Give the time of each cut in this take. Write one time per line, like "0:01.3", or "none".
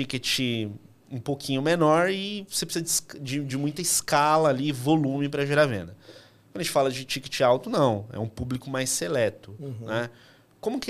none